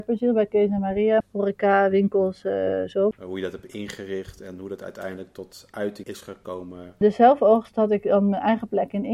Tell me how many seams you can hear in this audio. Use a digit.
3